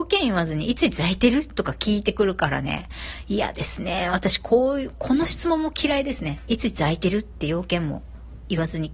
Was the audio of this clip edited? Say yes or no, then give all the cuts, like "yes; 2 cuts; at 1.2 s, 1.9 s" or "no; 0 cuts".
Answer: no; 0 cuts